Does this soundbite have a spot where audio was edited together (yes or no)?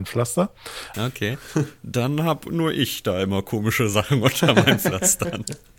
yes